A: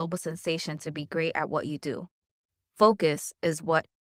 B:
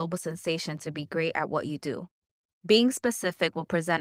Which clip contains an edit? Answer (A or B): B